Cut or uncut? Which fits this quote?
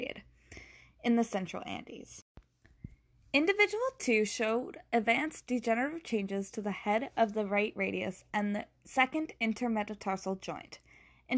uncut